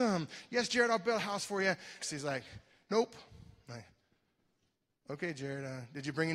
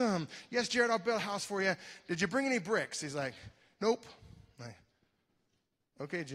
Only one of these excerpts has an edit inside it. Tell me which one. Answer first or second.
first